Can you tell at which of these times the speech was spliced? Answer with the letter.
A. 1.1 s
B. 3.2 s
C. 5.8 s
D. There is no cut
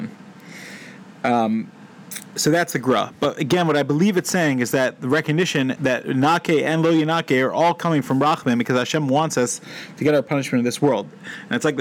C